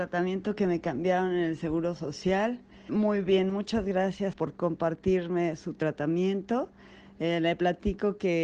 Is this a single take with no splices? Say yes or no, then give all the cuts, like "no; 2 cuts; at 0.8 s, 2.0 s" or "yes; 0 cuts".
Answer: no; 2 cuts; at 2.9 s, 4.3 s